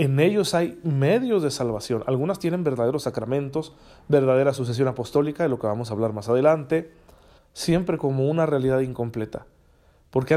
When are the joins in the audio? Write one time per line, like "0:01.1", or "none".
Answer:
0:07.4